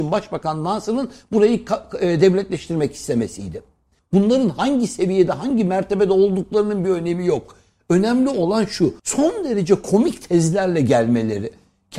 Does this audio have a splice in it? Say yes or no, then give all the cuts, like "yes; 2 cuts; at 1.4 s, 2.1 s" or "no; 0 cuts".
yes; 2 cuts; at 4.0 s, 9.0 s